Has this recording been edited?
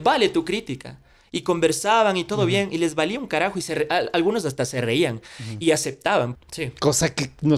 yes; 1 cut; at 6.3 s

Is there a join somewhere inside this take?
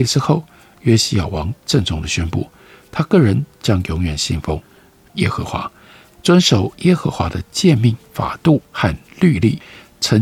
no; 0 cuts

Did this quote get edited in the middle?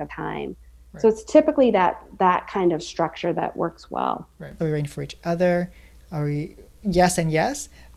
yes; 1 cut; at 4.6 s

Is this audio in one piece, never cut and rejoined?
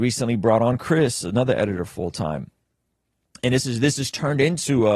yes; 0 cuts

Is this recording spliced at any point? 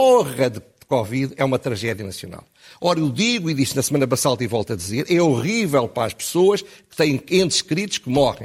no; 0 cuts

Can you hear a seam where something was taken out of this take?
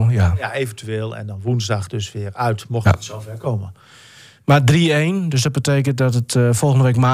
no; 0 cuts

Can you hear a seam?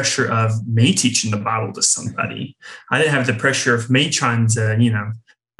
no; 0 cuts

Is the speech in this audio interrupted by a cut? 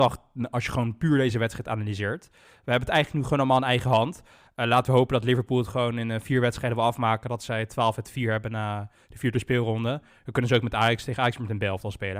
no; 0 cuts

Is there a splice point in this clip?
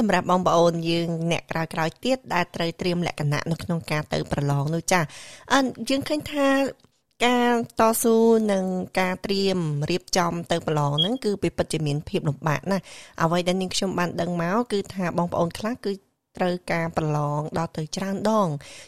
no; 0 cuts

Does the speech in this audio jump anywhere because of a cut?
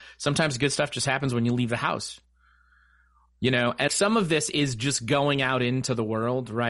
yes; 1 cut; at 3.9 s

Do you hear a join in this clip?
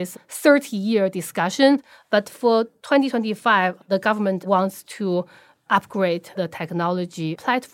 no; 0 cuts

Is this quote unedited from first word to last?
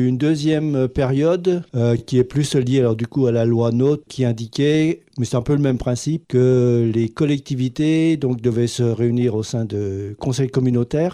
yes; 0 cuts

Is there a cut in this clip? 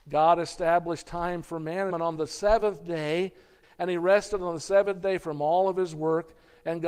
yes; 2 cuts; at 1.9 s, 3.6 s

